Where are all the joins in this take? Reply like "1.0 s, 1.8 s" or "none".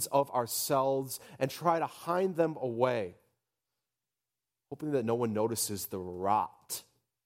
none